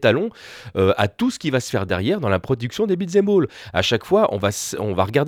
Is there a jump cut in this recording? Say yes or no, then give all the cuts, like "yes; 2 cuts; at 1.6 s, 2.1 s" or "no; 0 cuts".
no; 0 cuts